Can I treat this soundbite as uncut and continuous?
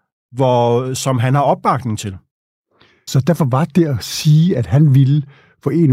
no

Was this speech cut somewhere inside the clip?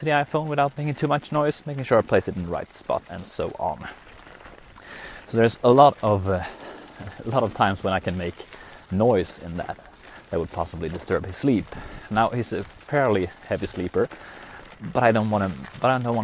no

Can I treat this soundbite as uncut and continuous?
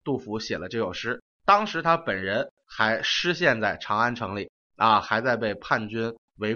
yes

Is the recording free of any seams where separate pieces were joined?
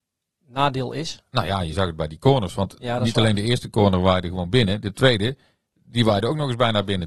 yes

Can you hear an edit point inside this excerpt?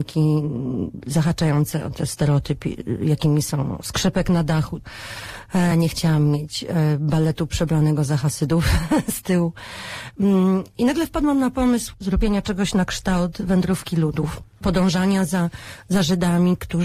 no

